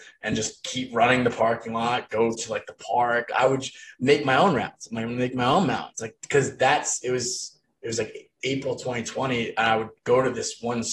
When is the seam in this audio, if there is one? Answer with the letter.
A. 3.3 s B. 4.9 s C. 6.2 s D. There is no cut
C